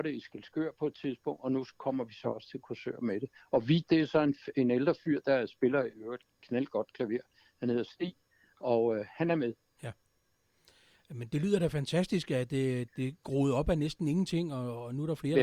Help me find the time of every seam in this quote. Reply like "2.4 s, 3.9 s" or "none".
12.9 s